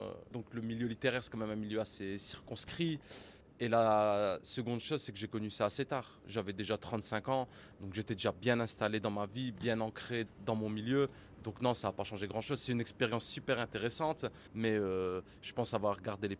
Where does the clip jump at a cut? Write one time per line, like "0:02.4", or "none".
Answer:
0:10.3
0:14.5